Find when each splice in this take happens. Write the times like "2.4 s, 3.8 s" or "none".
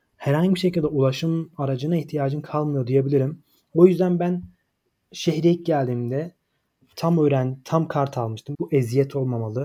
8.5 s